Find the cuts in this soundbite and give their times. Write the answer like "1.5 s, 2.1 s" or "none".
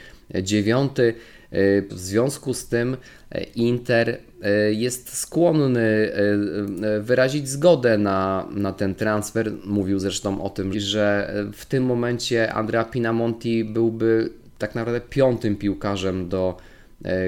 1.9 s, 10.7 s